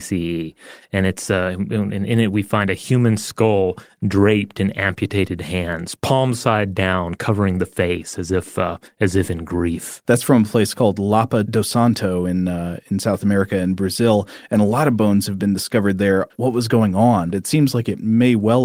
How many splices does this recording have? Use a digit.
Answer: 2